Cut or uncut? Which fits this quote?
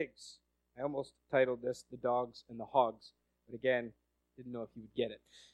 cut